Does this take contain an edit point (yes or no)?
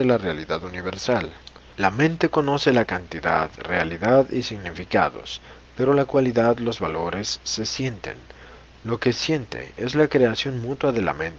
no